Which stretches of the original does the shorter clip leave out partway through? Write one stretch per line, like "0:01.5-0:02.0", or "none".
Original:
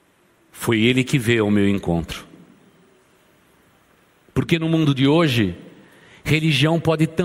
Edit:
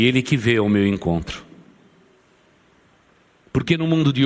none